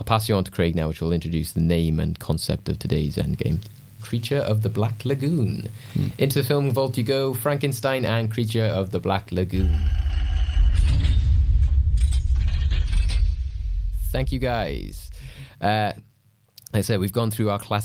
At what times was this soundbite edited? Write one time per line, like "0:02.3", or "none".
0:04.0
0:16.0